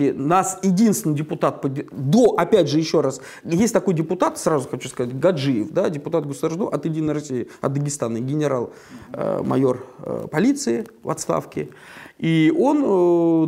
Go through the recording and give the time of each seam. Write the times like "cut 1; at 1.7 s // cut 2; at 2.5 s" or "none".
none